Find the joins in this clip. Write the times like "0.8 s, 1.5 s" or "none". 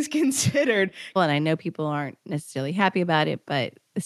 1.2 s